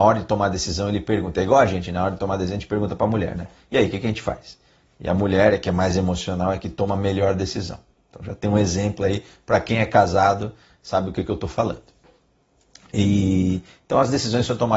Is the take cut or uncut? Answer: uncut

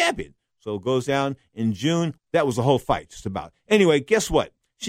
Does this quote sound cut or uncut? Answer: cut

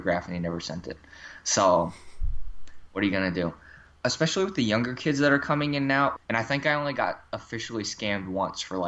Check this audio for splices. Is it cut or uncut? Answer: cut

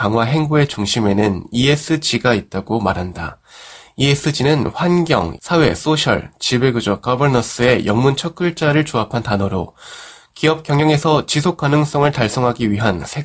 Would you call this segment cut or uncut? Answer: cut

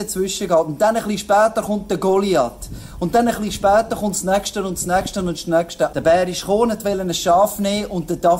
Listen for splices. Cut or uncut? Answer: cut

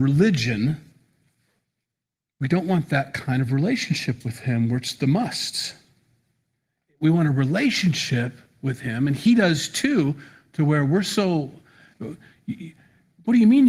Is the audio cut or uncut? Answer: uncut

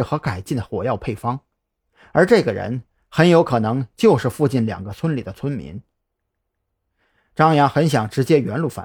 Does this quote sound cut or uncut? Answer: uncut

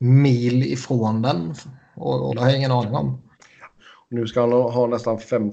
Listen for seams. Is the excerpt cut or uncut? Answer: cut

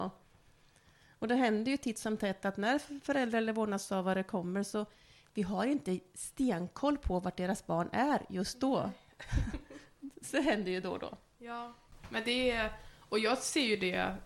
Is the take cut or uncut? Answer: uncut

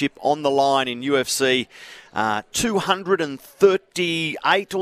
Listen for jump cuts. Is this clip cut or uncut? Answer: uncut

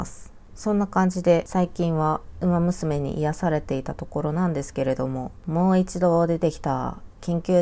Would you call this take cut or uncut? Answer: uncut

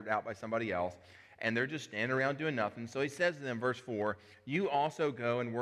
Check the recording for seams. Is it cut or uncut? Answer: uncut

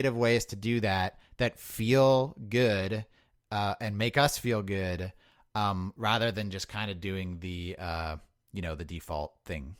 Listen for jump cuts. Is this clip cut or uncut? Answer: uncut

